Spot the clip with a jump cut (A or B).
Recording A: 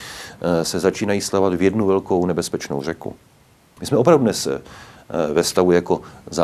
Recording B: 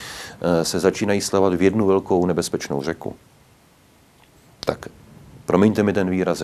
A